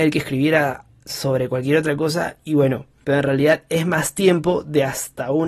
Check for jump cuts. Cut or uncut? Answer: cut